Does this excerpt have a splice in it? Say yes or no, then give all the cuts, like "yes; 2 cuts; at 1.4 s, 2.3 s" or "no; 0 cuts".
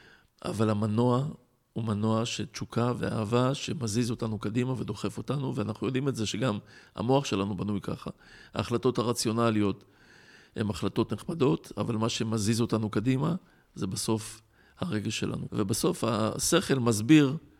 yes; 1 cut; at 15.5 s